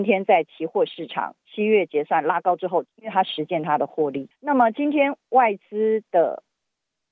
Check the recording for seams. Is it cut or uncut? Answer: cut